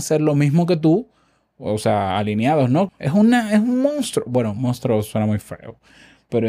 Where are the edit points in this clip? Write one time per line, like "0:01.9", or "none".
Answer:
0:02.9